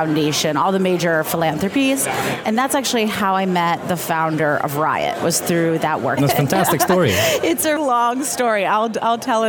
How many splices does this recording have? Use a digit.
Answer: 3